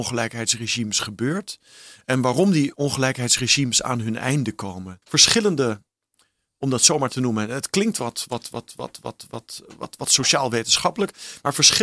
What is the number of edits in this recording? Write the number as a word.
one